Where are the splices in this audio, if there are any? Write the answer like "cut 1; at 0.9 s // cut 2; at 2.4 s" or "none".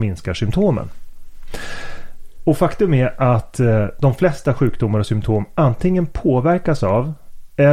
none